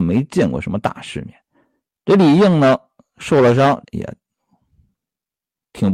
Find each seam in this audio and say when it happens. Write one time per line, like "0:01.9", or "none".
0:01.9
0:03.8